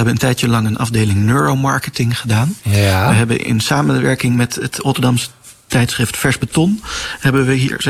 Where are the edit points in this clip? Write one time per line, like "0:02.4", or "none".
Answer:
none